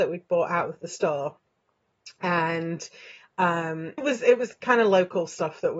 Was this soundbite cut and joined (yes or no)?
yes